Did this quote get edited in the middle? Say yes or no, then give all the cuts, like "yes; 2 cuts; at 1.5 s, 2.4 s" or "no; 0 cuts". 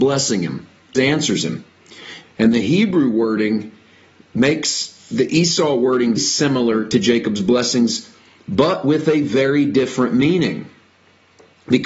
yes; 3 cuts; at 0.9 s, 2.2 s, 6.2 s